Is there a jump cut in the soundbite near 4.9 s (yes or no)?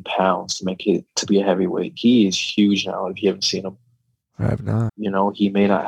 yes